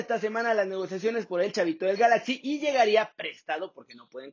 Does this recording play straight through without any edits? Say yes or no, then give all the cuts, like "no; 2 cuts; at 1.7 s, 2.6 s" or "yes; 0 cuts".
yes; 0 cuts